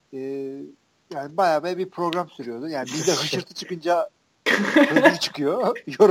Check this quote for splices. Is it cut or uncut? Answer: uncut